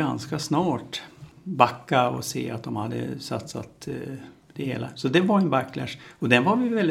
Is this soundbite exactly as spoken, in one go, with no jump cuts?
yes; 0 cuts

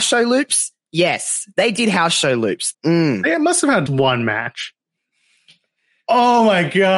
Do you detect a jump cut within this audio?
yes; 2 cuts; at 2.7 s, 3.9 s

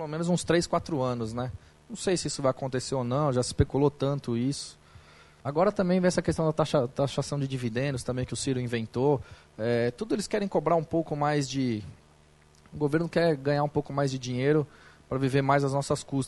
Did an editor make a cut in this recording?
yes; 1 cut; at 5.4 s

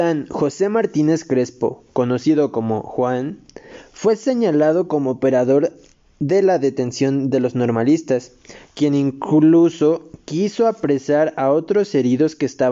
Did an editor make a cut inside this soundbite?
no; 0 cuts

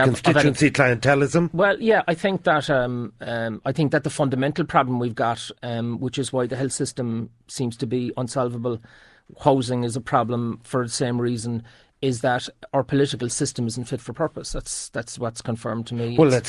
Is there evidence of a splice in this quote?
no; 0 cuts

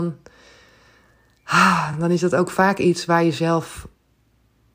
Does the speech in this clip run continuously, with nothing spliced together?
yes; 0 cuts

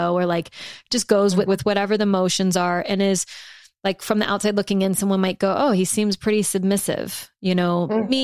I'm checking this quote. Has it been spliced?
yes; 1 cut; at 1.5 s

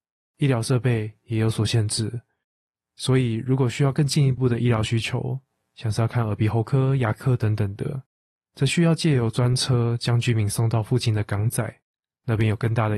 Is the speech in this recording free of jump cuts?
yes; 0 cuts

